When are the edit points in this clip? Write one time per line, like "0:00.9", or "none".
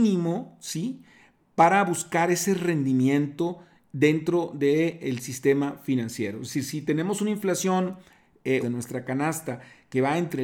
0:08.6